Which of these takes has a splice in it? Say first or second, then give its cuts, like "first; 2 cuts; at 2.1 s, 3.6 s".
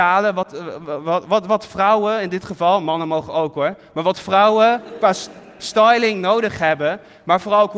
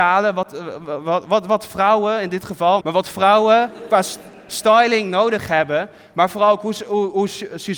second; 1 cut; at 2.8 s